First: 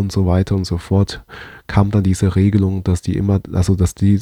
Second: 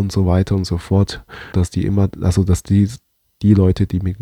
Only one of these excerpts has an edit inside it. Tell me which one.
second; 1 cut; at 1.5 s

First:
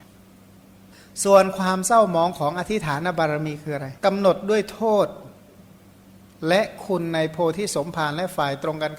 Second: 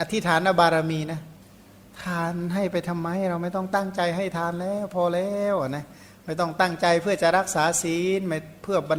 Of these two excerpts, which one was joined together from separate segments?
first; 1 cut; at 4.0 s

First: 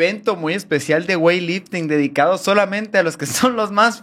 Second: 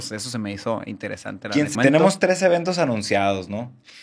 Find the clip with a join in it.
second; 1 cut; at 1.7 s

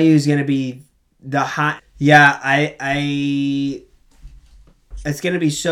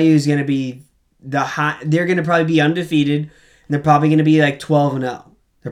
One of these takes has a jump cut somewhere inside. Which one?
first; 1 cut; at 1.8 s

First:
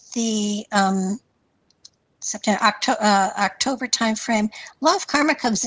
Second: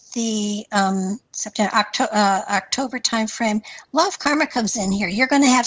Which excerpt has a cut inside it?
second; 1 cut; at 1.3 s

